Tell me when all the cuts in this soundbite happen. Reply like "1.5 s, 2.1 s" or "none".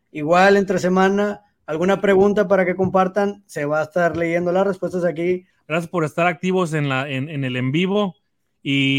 5.5 s

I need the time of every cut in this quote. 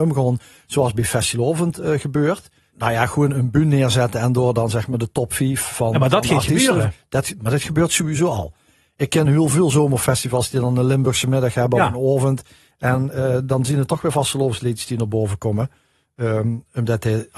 2.7 s

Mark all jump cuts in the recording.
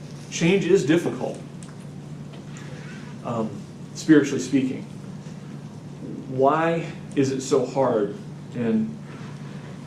none

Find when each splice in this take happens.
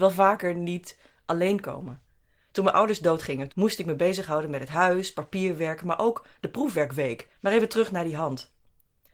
3.5 s, 7.3 s

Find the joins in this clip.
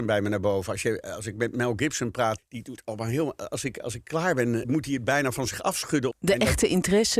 2.4 s, 4.6 s, 6.1 s

